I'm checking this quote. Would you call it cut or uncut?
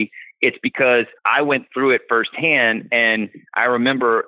cut